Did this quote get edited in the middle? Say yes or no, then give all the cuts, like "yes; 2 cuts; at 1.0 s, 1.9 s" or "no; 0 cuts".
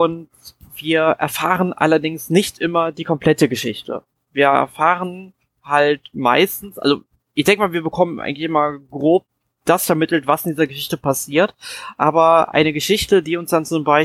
no; 0 cuts